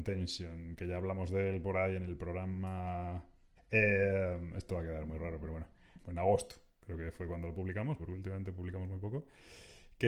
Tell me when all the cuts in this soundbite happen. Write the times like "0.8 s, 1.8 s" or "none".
3.6 s, 6.0 s, 8.0 s